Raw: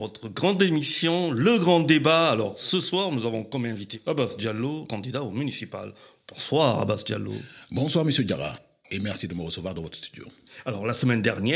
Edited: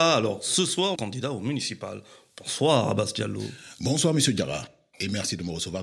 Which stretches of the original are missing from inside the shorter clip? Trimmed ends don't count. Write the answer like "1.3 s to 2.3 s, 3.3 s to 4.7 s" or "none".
3.1 s to 4.9 s